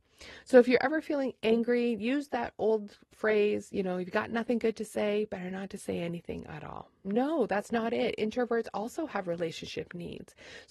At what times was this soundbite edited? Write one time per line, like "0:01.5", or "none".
0:07.0